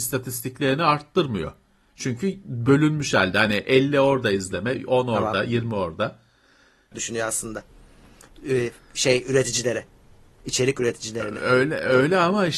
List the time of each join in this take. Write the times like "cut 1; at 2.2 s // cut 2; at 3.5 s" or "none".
cut 1; at 6.9 s

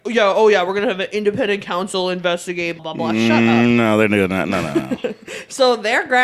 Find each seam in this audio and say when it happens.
cut 1; at 2.8 s

